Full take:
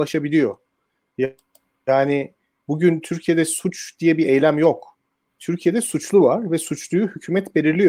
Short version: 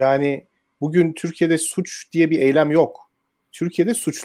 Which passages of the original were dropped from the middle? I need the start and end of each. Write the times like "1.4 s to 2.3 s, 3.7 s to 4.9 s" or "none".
none